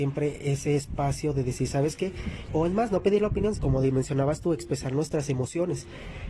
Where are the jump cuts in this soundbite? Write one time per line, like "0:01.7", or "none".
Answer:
0:02.5
0:03.5